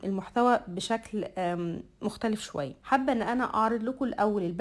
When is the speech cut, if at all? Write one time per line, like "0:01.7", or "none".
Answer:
0:02.8